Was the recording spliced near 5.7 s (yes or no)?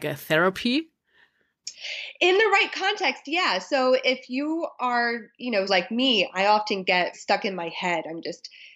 yes